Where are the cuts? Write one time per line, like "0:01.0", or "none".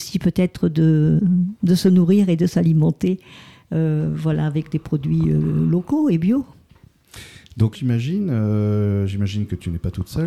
0:07.7